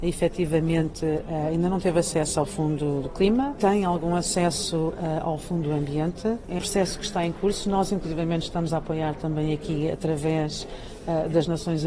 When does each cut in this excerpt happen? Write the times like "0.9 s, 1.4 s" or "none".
6.6 s